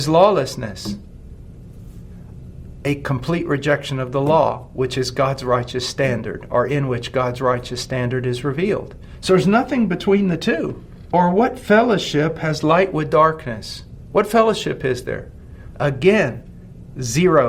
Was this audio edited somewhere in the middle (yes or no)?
yes